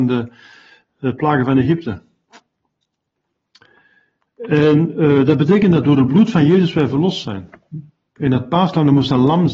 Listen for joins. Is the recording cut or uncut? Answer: uncut